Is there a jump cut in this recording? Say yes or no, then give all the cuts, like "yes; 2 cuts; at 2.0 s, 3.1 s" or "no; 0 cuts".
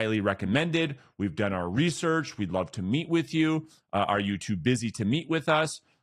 no; 0 cuts